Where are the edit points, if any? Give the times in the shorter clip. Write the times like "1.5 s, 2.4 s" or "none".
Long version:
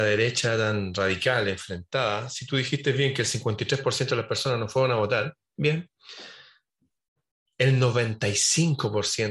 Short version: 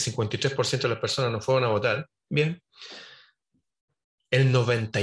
none